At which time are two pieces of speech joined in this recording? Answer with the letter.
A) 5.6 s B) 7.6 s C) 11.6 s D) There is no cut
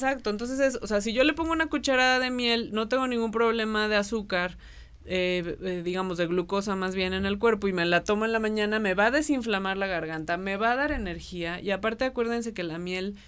D